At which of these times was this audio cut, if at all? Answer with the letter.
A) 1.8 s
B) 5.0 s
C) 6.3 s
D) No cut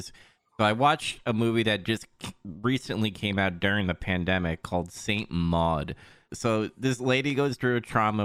C